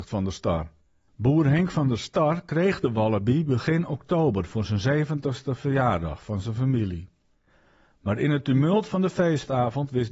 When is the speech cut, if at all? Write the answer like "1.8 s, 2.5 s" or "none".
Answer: 1.1 s